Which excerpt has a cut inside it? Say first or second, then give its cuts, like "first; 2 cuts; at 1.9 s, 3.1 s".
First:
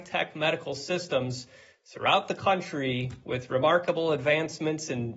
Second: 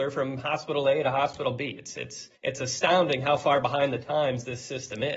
second; 1 cut; at 2.4 s